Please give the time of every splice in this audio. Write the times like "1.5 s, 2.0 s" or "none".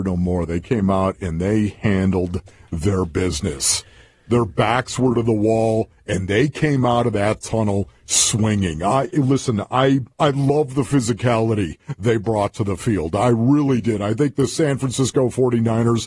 10.1 s

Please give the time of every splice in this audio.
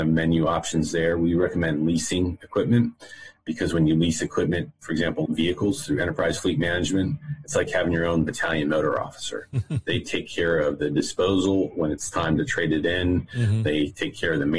5.3 s

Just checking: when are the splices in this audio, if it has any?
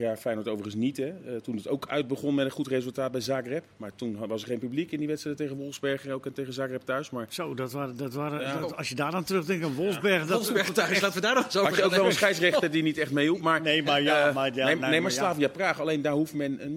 none

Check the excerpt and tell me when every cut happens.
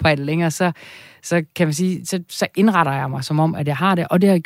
none

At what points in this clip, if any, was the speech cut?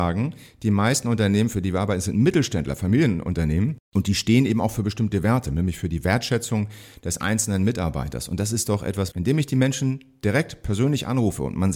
9.1 s

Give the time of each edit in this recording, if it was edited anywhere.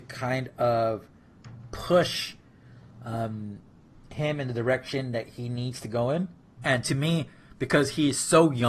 6.6 s

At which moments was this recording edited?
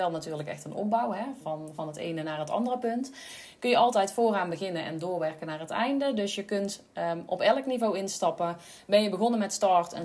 1.4 s

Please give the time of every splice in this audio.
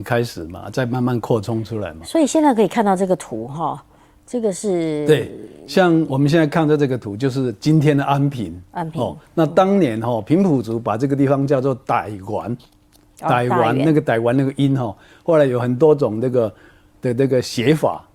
none

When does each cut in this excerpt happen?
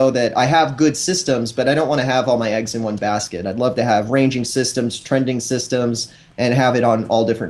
none

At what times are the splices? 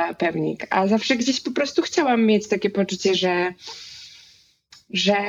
none

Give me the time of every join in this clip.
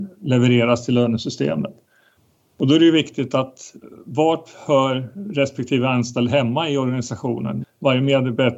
7.6 s

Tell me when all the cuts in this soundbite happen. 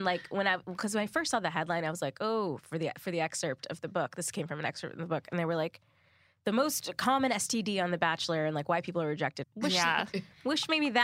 9.4 s

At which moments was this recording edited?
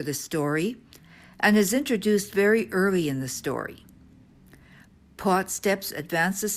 none

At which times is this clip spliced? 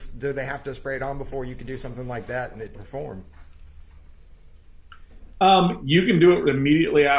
2.7 s

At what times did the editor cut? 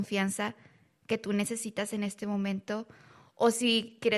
none

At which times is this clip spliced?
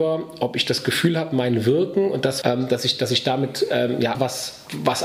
2.4 s, 4.1 s

